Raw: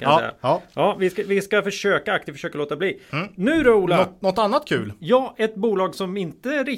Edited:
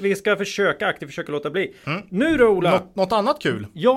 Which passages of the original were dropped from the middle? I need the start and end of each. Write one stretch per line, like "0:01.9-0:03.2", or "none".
none